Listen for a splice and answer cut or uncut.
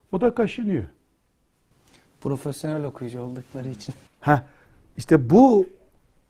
uncut